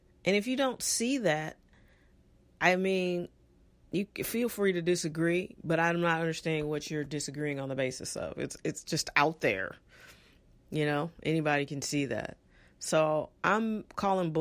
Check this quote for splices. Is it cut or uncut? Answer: uncut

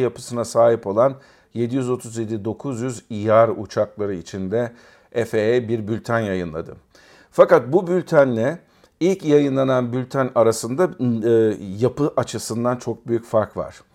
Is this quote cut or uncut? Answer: uncut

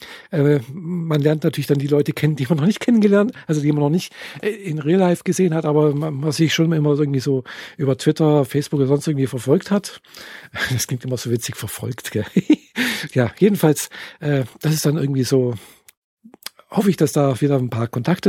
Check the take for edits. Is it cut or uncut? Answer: uncut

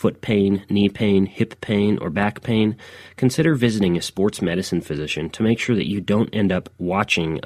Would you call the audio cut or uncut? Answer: uncut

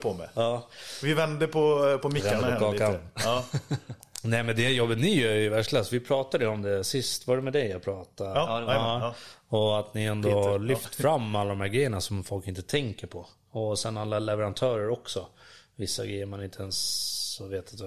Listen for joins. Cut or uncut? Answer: uncut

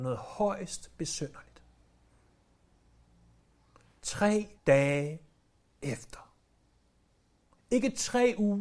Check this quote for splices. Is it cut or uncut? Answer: cut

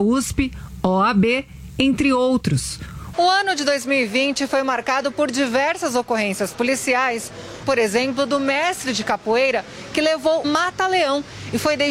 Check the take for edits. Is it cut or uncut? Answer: cut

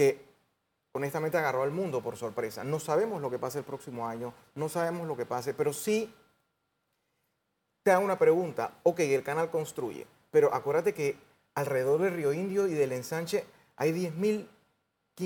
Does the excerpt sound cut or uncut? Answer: uncut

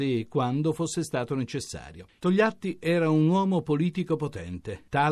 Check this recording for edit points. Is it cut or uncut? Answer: cut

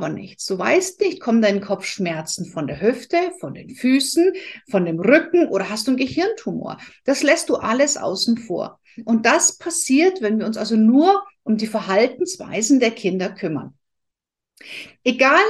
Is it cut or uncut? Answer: uncut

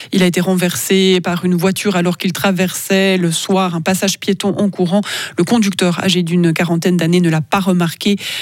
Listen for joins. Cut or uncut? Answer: uncut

